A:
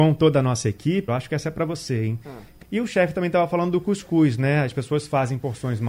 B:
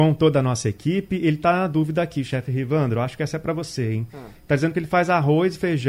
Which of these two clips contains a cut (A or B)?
A